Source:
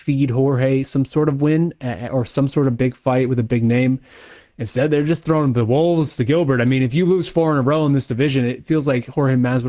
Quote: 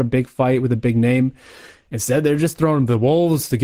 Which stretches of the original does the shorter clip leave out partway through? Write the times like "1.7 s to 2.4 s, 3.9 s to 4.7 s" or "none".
none